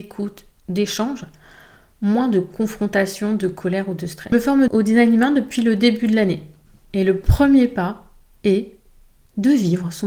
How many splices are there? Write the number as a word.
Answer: one